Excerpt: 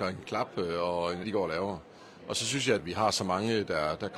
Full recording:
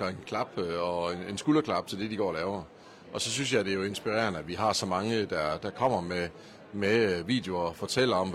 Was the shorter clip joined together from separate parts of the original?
yes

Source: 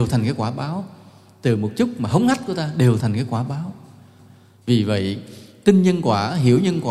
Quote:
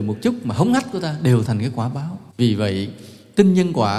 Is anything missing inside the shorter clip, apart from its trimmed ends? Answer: yes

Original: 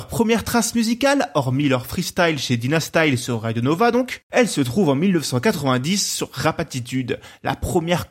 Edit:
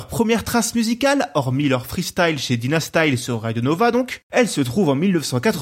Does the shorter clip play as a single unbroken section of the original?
yes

